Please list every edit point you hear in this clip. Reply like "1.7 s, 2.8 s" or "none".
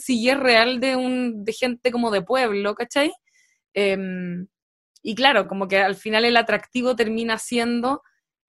none